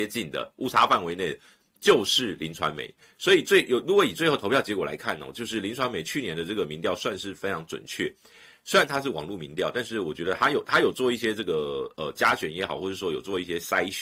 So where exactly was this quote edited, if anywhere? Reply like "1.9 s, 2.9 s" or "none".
none